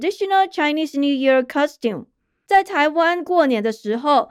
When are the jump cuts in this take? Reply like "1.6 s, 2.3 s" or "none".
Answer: 2.5 s